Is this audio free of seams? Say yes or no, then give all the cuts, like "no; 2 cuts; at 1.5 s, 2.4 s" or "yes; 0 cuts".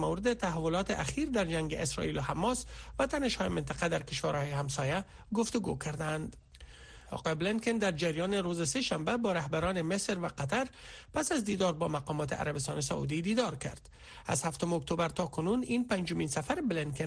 no; 1 cut; at 7.1 s